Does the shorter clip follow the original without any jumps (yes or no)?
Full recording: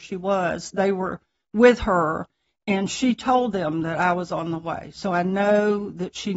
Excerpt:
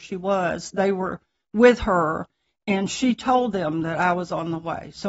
yes